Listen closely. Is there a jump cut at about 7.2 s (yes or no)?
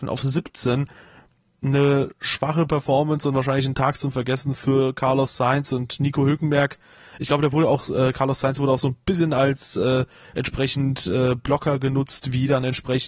no